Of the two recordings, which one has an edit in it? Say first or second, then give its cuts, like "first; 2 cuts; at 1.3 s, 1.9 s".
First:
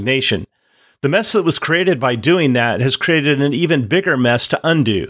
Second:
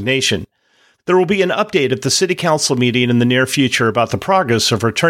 second; 1 cut; at 1.0 s